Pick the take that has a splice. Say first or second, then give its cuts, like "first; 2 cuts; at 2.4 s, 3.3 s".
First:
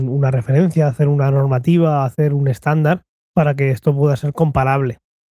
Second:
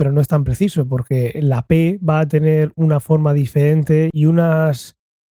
second; 1 cut; at 4.1 s